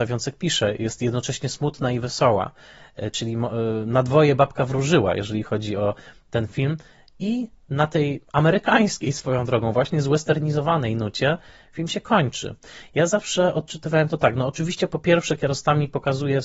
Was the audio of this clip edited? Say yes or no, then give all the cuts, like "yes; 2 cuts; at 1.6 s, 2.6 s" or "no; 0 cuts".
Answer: no; 0 cuts